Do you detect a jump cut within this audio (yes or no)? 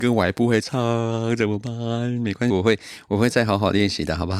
yes